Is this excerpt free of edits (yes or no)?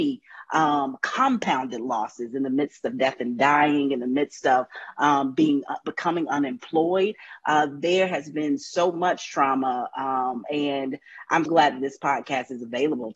no